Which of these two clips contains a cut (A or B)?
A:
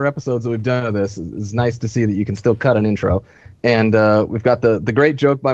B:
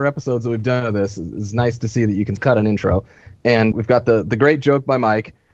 B